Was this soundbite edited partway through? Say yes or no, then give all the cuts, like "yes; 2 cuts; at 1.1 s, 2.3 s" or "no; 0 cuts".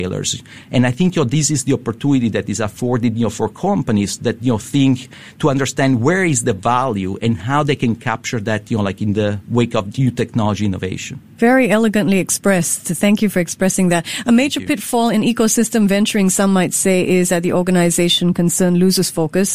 no; 0 cuts